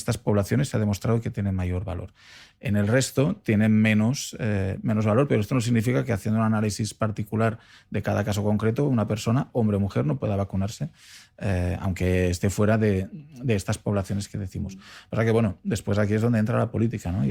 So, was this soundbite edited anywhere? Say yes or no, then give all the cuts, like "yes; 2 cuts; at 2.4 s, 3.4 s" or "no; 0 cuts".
no; 0 cuts